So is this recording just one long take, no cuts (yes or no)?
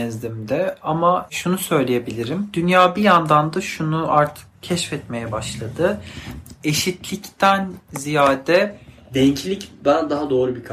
yes